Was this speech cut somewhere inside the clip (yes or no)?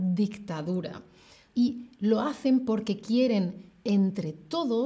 yes